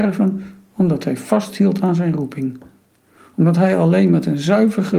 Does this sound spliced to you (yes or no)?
no